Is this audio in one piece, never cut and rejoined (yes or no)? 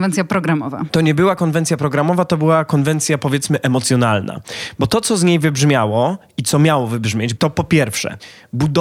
no